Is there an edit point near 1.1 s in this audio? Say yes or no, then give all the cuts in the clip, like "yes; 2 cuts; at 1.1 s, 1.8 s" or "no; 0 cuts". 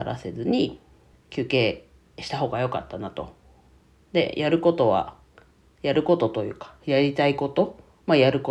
yes; 1 cut; at 1.1 s